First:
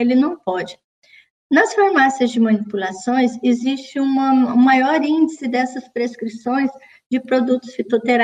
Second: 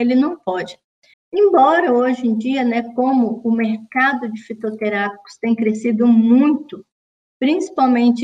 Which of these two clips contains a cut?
second; 1 cut; at 1.1 s

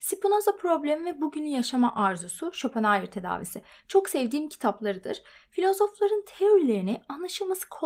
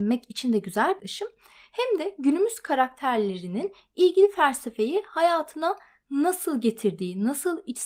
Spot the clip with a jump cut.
second; 1 cut; at 1.0 s

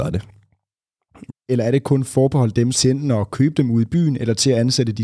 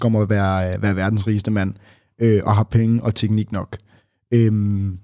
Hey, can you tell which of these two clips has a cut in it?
first; 2 cuts; at 1.3 s, 2.7 s

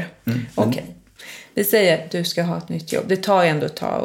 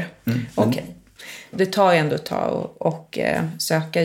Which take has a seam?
second; 1 cut; at 1.5 s

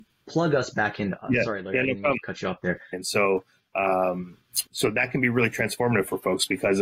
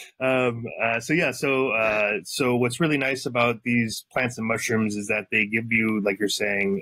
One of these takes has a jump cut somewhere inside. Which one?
first; 2 cuts; at 2.9 s, 4.7 s

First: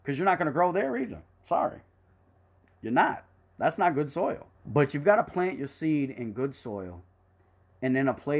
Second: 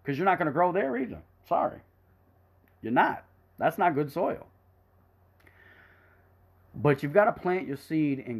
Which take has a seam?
first; 1 cut; at 4.5 s

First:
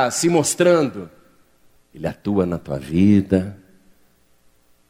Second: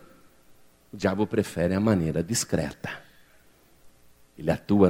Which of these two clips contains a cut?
first; 1 cut; at 1.8 s

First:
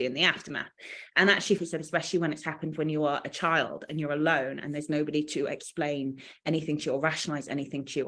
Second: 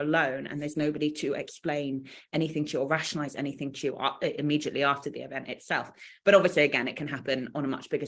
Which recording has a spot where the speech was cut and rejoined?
first; 1 cut; at 1.6 s

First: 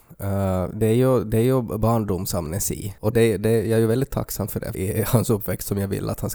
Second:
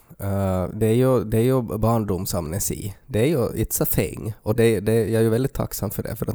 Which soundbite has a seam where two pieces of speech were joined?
first; 2 cuts; at 3.0 s, 4.7 s

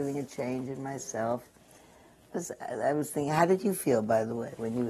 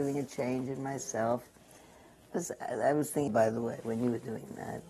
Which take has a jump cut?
second; 1 cut; at 3.3 s

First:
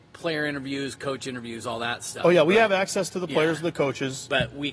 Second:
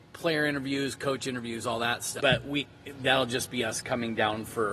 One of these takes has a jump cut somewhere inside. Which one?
second; 1 cut; at 2.2 s

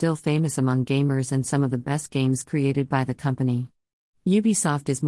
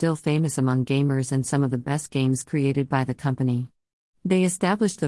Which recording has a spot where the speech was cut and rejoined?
second; 1 cut; at 4.2 s

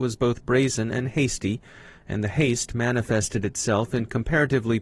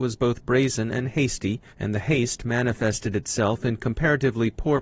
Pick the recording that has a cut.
second; 1 cut; at 1.7 s

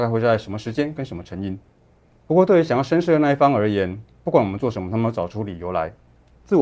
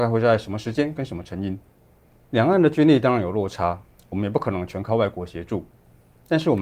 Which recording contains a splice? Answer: first; 1 cut; at 2.2 s

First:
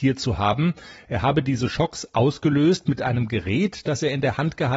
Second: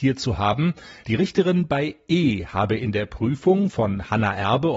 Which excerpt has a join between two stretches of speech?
second; 1 cut; at 1.0 s

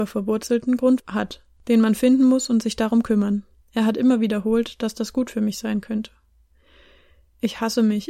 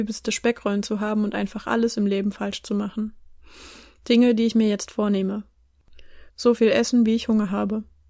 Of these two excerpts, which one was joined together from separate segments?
second; 1 cut; at 6.3 s

